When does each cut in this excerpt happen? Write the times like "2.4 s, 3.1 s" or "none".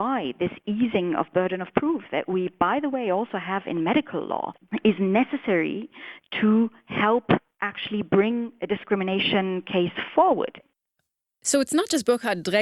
none